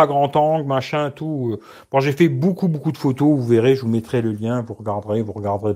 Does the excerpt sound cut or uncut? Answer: uncut